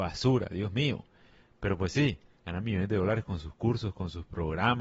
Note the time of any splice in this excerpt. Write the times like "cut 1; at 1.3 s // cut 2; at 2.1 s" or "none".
cut 1; at 2.3 s